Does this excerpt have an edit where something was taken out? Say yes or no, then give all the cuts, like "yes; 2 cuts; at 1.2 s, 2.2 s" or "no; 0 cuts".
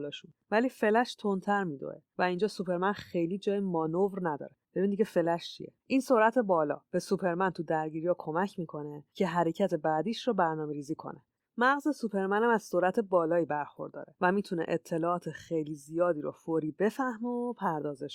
yes; 1 cut; at 5.8 s